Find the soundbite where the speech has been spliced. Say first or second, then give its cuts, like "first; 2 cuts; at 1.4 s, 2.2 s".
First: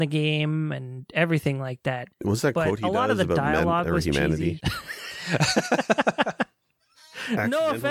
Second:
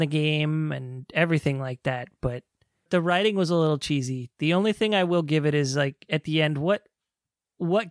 first; 2 cuts; at 2.1 s, 4.6 s